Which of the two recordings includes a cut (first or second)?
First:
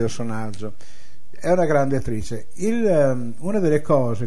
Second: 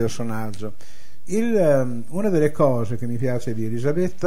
second